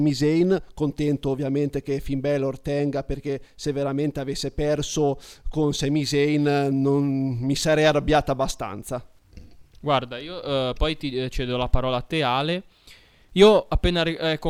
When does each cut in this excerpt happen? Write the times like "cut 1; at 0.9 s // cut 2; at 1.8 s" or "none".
none

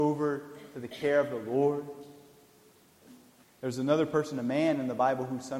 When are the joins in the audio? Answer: cut 1; at 3.4 s

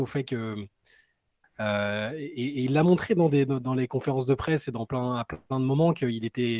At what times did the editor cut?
cut 1; at 1.4 s

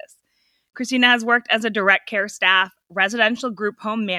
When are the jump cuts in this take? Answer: none

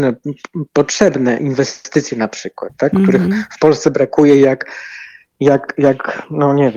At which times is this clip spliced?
none

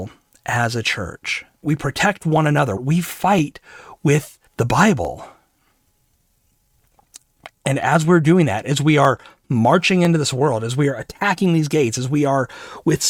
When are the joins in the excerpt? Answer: cut 1; at 1.6 s // cut 2; at 2.8 s // cut 3; at 4.5 s

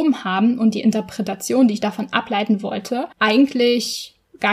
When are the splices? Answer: cut 1; at 3.1 s

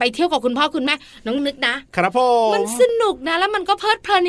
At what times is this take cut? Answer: cut 1; at 1.4 s

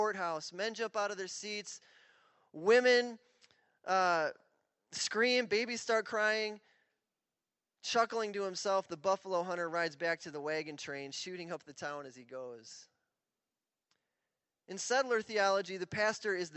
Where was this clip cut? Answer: none

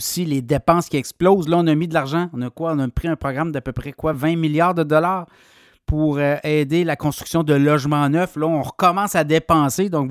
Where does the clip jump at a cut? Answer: none

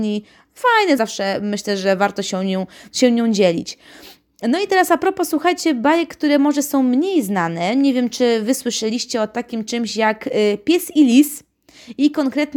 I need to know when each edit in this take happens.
cut 1; at 1.0 s

